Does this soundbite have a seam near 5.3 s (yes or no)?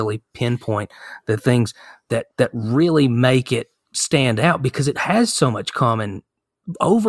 no